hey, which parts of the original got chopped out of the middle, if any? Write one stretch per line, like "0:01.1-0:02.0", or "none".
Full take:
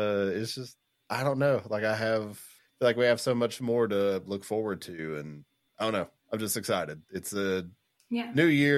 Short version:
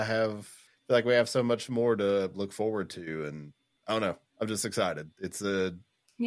none